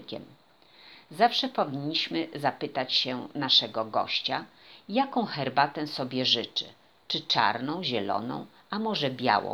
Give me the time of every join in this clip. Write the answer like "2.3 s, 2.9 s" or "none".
none